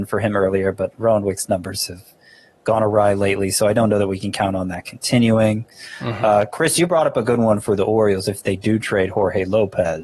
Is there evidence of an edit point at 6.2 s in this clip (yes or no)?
no